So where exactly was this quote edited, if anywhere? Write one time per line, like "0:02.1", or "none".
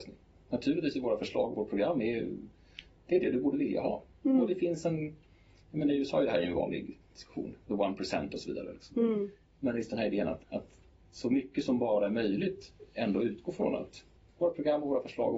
0:10.4